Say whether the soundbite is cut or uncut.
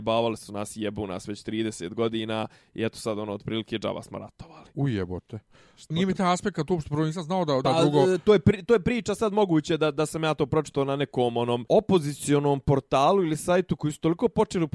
cut